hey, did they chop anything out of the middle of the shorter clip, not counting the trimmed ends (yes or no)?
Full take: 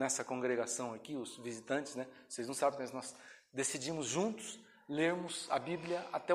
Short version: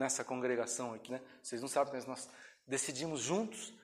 yes